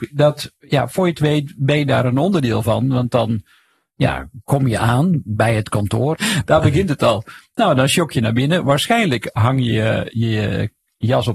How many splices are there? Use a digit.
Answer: 1